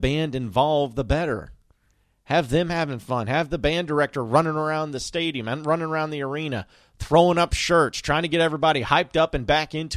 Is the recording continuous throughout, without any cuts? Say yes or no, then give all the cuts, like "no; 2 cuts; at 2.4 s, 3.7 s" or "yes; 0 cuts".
yes; 0 cuts